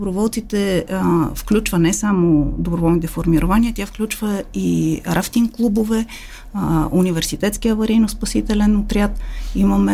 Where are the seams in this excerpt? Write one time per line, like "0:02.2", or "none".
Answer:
none